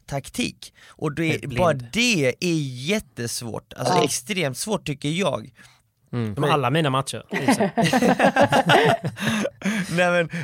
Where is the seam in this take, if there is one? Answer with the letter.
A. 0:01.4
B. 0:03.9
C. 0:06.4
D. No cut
C